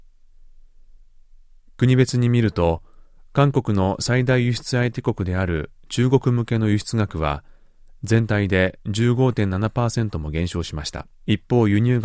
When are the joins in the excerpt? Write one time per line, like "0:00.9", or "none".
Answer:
0:11.1